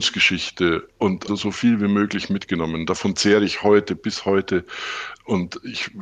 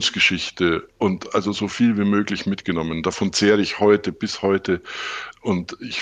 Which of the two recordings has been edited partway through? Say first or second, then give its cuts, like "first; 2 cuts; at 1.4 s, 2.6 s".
first; 1 cut; at 1.3 s